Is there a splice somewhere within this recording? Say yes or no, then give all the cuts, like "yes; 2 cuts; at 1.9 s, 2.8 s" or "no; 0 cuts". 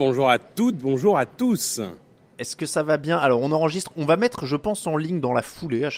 no; 0 cuts